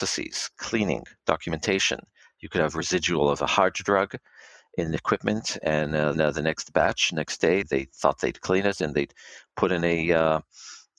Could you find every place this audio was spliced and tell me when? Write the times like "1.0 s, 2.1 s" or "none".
6.1 s, 7.6 s